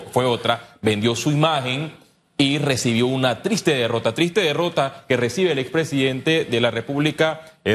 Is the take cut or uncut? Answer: uncut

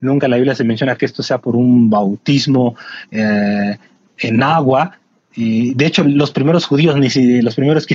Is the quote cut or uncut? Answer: uncut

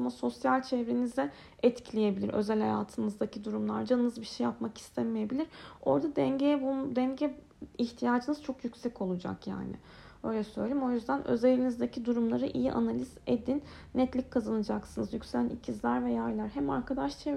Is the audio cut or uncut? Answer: uncut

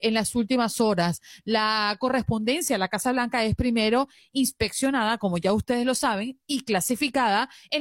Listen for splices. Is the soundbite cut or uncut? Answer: uncut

